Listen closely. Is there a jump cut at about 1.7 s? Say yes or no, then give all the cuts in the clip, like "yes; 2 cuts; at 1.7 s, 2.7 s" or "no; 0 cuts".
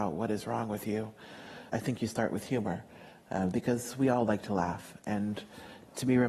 yes; 1 cut; at 1.7 s